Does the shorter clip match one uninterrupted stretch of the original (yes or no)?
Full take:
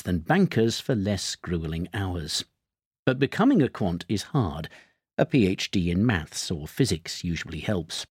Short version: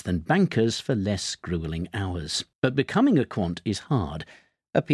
no